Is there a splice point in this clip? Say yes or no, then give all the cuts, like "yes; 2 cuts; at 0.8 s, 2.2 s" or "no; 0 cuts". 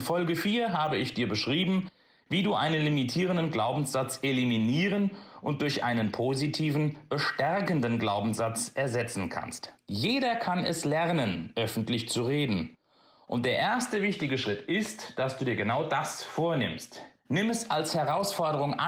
yes; 2 cuts; at 9.8 s, 17.2 s